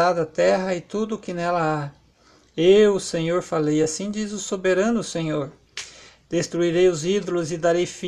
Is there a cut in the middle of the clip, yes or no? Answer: no